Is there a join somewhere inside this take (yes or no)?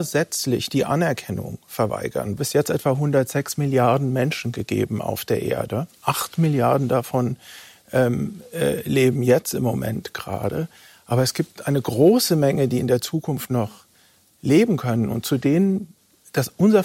yes